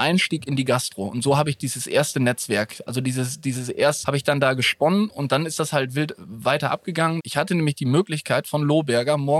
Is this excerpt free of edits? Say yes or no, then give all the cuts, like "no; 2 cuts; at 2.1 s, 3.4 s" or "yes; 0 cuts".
no; 2 cuts; at 4.0 s, 7.2 s